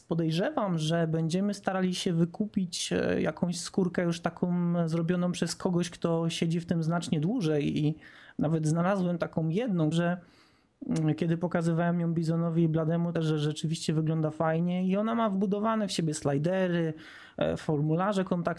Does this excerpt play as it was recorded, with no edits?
no; 2 cuts; at 9.9 s, 13.2 s

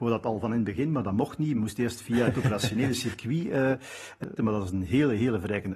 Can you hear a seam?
yes; 1 cut; at 4.4 s

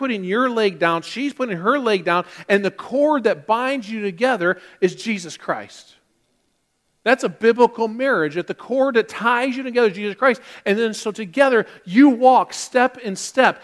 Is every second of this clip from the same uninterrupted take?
yes; 0 cuts

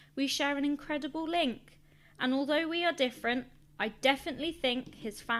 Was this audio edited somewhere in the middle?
no; 0 cuts

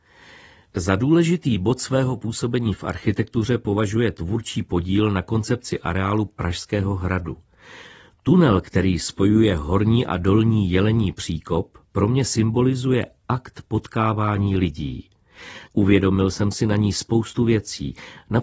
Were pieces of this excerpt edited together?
yes; 1 cut; at 15.7 s

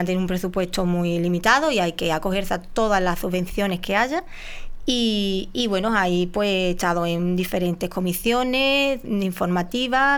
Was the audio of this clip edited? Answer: no; 0 cuts

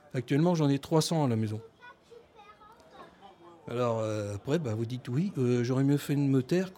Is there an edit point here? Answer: no; 0 cuts

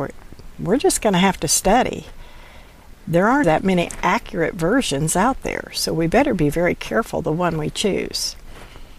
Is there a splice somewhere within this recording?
yes; 1 cut; at 3.4 s

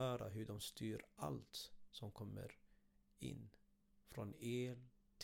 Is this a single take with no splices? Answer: yes; 0 cuts

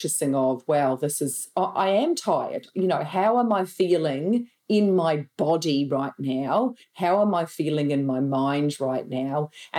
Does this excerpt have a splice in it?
no; 0 cuts

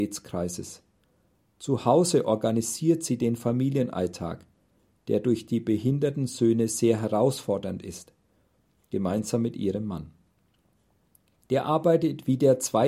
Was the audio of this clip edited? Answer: no; 0 cuts

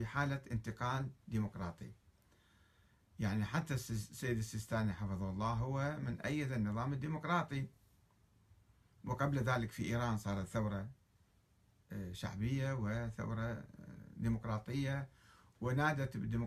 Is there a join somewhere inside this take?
no; 0 cuts

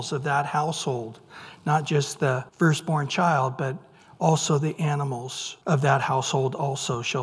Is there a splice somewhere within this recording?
yes; 2 cuts; at 2.5 s, 5.6 s

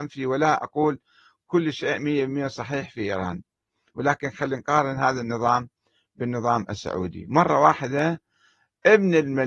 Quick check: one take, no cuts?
yes; 0 cuts

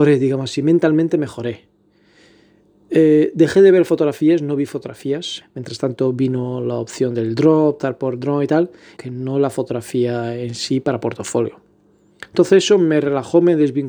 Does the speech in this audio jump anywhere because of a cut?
yes; 2 cuts; at 5.4 s, 9.0 s

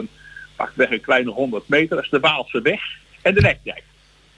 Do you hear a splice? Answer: yes; 1 cut; at 3.1 s

